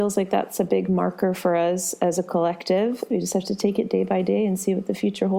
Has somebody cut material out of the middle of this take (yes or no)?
yes